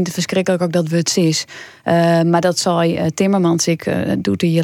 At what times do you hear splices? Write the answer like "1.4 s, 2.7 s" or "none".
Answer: none